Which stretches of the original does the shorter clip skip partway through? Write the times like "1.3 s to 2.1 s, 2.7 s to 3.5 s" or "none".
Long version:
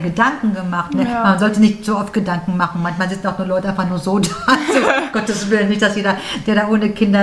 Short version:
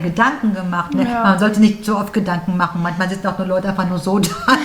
none